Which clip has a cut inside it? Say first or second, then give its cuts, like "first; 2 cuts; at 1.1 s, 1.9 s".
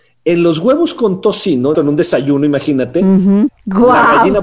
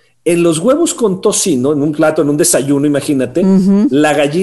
first; 2 cuts; at 1.7 s, 3.5 s